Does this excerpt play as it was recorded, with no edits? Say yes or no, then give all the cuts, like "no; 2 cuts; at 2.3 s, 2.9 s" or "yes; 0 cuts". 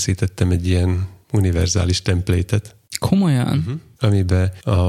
yes; 0 cuts